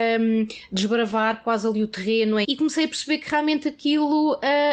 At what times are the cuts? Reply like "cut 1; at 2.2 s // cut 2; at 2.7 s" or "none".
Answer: cut 1; at 2.4 s